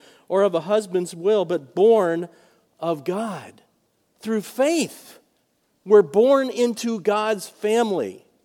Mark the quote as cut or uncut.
uncut